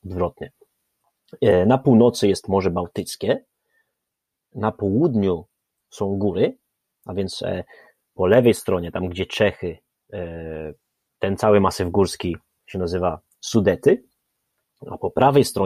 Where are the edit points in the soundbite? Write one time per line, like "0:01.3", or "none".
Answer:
none